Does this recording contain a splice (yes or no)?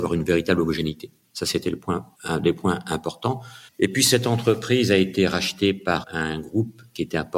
yes